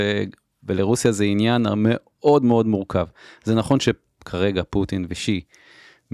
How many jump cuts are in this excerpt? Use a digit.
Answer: 0